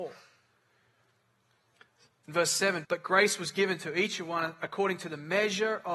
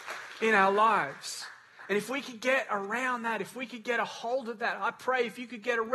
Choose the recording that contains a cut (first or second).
first